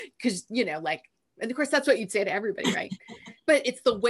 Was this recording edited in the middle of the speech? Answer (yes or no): no